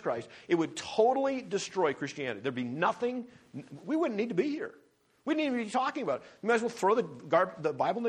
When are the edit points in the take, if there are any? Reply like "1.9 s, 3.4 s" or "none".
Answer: none